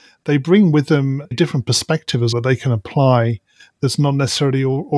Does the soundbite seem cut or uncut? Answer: cut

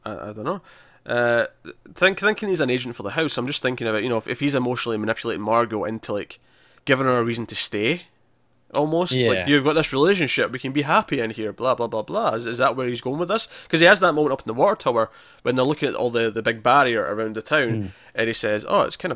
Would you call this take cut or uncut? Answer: uncut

